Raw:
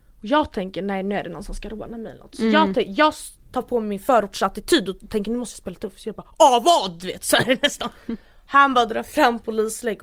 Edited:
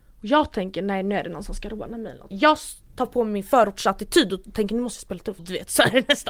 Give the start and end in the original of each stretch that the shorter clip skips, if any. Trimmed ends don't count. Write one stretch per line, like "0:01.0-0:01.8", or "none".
0:02.3-0:02.9
0:05.9-0:06.9